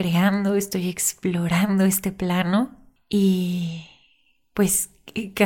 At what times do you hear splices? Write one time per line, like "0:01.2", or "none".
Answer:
none